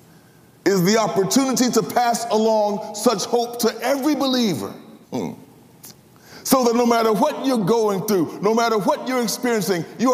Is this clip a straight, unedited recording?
no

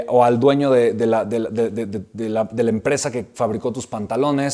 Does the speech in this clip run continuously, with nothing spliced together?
yes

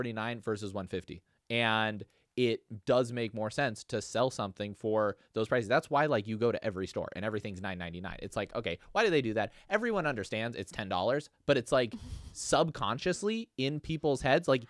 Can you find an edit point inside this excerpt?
no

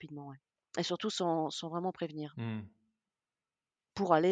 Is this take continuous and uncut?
yes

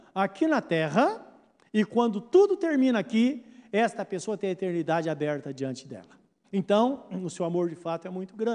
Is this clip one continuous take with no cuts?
no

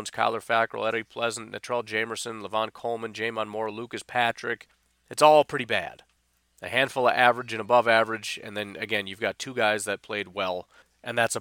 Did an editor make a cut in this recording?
no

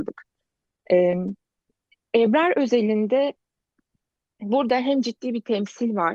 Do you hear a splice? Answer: no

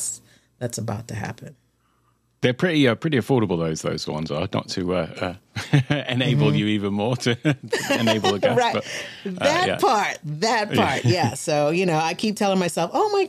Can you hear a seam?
no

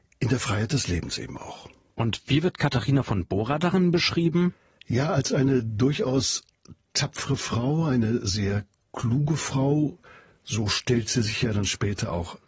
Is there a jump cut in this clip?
no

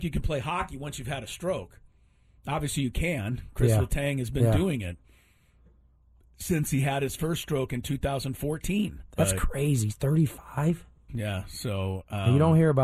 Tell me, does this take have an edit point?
yes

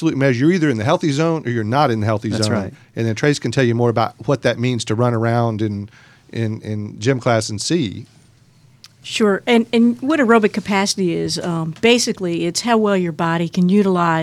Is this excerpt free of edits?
yes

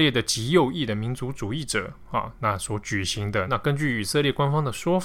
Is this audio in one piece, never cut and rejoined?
no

